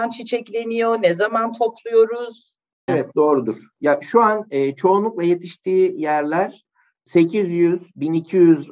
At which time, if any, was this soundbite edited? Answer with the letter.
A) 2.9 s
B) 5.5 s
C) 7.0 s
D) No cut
A